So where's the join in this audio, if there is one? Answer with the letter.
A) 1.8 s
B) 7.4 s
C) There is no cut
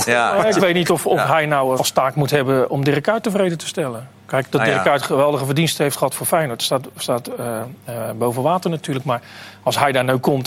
A